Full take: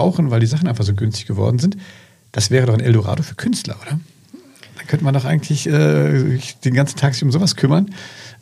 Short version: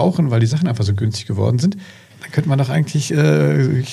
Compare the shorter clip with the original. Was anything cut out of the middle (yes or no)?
yes